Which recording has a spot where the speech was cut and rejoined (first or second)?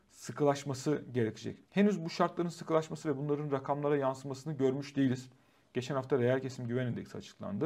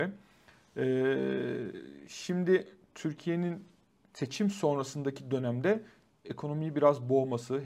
first